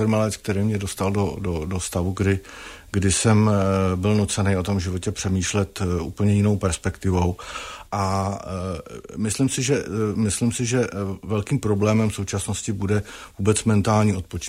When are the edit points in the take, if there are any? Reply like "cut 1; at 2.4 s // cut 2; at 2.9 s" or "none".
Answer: cut 1; at 7.9 s

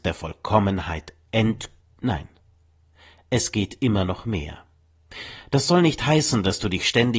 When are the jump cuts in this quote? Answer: cut 1; at 1.8 s

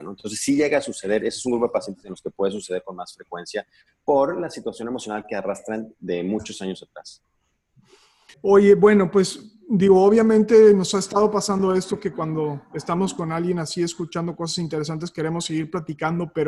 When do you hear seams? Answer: cut 1; at 8.3 s

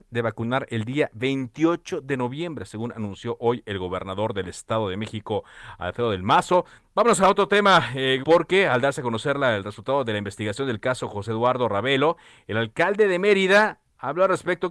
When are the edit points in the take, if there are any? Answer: cut 1; at 6.8 s // cut 2; at 8.2 s

